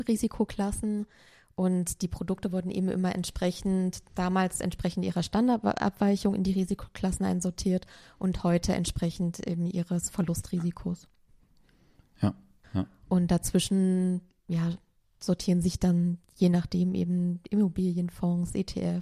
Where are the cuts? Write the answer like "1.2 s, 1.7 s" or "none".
12.6 s

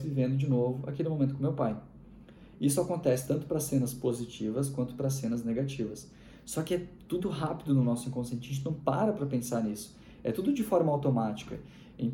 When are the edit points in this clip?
7.2 s

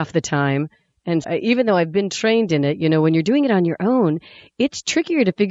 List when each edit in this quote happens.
1.2 s

